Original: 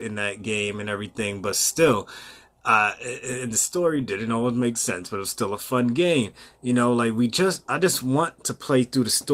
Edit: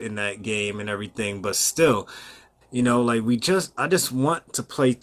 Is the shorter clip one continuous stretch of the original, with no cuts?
no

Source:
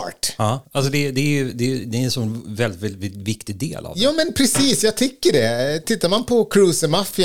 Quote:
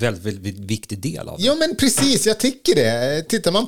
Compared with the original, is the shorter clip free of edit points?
yes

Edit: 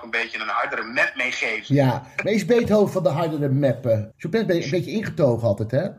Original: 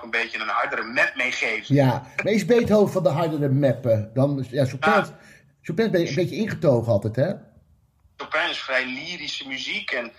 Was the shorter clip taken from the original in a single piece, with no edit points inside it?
no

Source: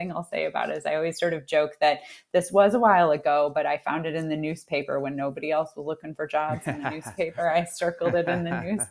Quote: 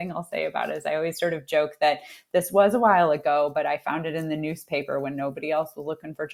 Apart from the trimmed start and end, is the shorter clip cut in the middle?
no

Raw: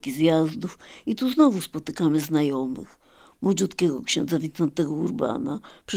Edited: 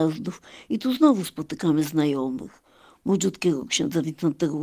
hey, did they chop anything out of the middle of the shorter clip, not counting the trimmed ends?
no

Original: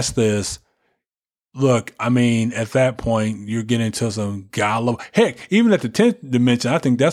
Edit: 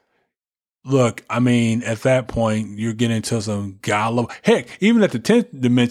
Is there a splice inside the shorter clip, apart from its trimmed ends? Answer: no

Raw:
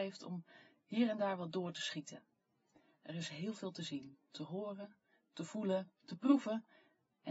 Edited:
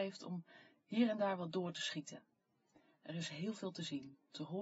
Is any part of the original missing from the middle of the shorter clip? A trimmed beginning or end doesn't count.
no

